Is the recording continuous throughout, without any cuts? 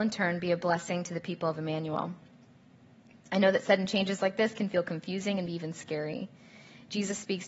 no; 1 cut; at 5.5 s

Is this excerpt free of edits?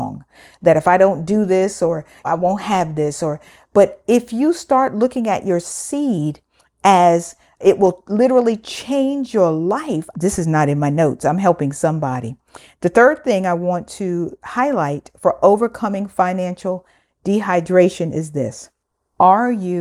no; 2 cuts; at 2.2 s, 10.1 s

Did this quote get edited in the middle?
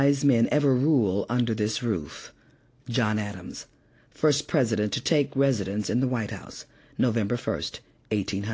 no; 0 cuts

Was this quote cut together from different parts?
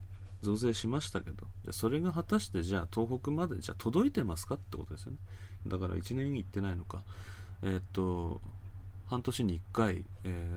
yes; 1 cut; at 5.6 s

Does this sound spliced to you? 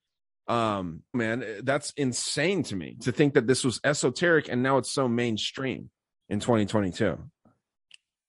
yes; 1 cut; at 1.1 s

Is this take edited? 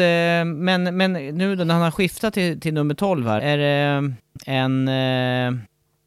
yes; 1 cut; at 3.4 s

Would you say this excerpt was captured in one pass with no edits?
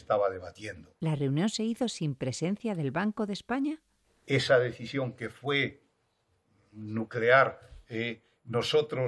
yes; 0 cuts

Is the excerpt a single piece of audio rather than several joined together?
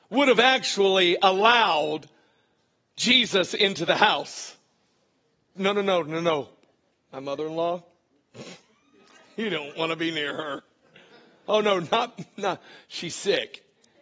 no; 1 cut; at 5.5 s

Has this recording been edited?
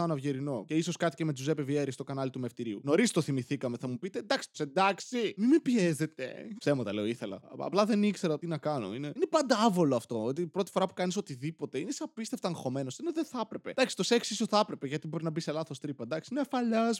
yes; 2 cuts; at 4.5 s, 6.6 s

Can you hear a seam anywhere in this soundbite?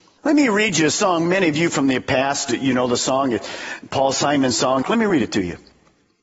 yes; 1 cut; at 4.8 s

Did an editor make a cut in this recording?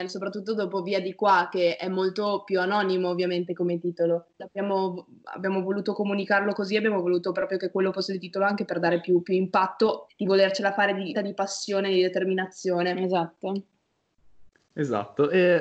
yes; 3 cuts; at 4.4 s, 10.1 s, 11.1 s

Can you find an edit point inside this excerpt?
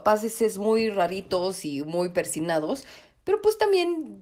no; 0 cuts

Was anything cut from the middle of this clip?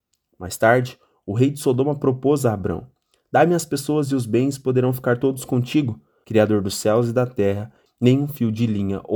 yes; 2 cuts; at 6.2 s, 7.9 s

